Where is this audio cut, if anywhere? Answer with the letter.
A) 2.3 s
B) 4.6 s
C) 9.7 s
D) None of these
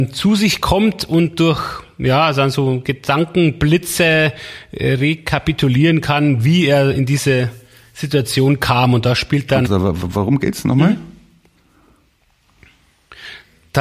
C